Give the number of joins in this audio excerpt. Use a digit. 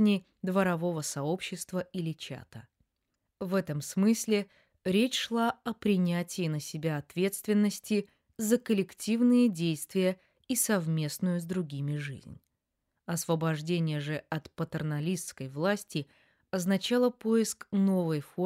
0